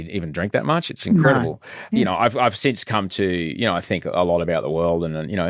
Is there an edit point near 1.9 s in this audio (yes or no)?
yes